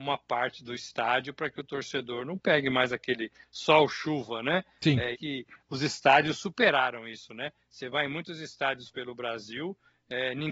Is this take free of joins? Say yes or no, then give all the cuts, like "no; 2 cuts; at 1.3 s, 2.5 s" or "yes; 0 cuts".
no; 1 cut; at 5.1 s